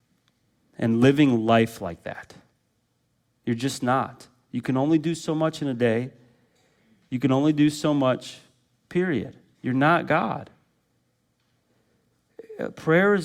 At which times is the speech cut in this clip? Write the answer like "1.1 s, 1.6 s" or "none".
3.3 s